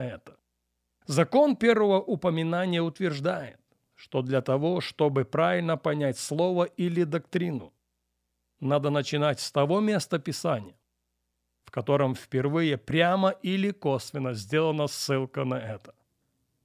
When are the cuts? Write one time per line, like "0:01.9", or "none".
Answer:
0:01.0